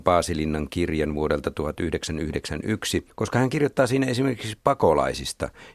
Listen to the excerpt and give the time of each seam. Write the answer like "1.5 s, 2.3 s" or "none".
none